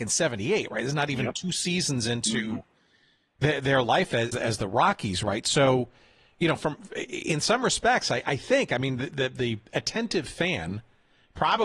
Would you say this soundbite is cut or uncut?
cut